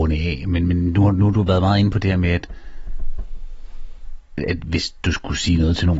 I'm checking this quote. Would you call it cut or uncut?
uncut